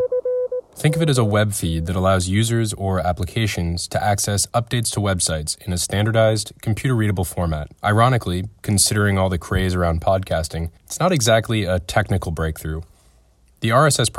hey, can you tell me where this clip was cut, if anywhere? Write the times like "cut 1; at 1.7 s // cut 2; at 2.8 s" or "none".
cut 1; at 7.8 s // cut 2; at 10.8 s